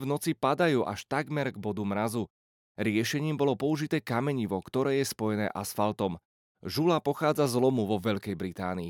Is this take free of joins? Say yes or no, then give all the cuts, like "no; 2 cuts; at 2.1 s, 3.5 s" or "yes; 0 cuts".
yes; 0 cuts